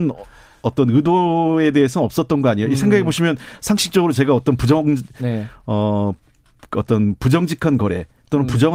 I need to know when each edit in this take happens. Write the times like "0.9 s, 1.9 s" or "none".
5.2 s